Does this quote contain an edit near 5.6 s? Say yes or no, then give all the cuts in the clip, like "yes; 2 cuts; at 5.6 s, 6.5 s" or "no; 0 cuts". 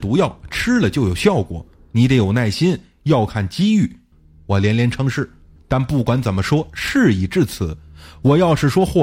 yes; 2 cuts; at 4.1 s, 5.6 s